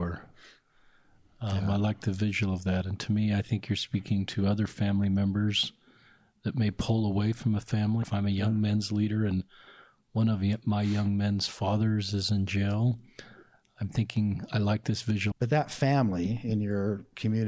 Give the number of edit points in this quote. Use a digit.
2